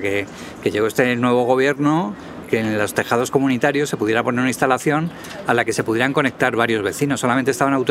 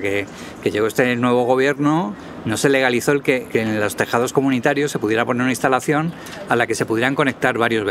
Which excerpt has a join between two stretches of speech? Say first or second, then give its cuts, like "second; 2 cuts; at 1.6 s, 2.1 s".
first; 1 cut; at 2.4 s